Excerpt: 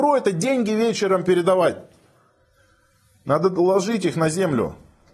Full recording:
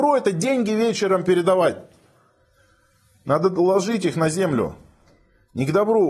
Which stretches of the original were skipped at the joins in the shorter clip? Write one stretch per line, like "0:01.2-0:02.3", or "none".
none